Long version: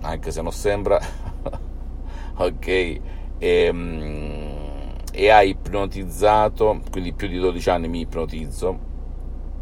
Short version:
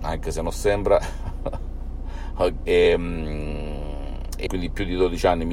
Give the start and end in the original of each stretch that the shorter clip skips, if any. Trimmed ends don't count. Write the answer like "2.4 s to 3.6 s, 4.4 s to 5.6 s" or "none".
2.6 s to 3.4 s, 5.2 s to 6.9 s